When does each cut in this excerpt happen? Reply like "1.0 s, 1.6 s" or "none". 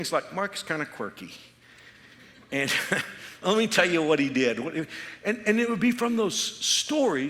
3.4 s